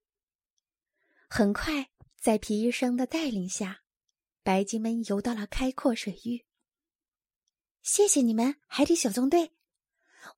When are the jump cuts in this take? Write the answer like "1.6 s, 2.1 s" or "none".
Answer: none